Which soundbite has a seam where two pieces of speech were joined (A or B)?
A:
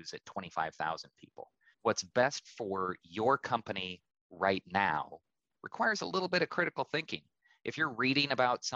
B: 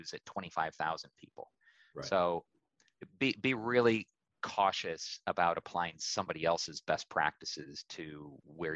A